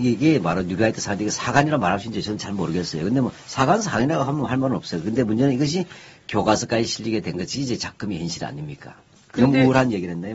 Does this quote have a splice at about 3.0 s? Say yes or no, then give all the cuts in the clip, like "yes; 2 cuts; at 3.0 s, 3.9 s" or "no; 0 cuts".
no; 0 cuts